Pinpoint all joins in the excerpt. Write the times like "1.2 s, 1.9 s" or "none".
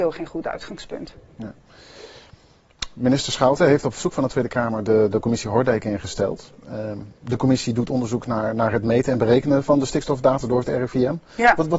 none